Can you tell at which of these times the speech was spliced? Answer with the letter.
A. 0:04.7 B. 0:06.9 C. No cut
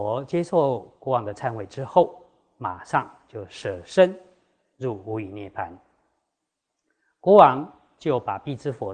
C